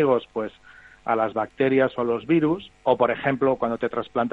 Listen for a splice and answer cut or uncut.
cut